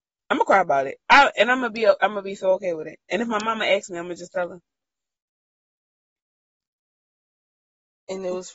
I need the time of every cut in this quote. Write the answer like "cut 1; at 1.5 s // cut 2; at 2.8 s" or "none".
none